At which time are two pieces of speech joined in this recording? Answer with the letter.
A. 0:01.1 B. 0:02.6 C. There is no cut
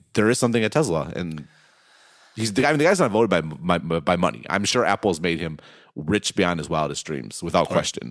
C